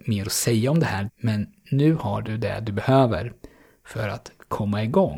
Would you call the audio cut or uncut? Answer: cut